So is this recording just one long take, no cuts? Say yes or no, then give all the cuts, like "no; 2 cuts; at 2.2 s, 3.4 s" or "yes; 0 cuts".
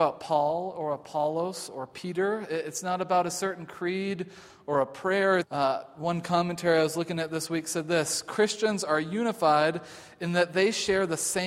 no; 1 cut; at 5.4 s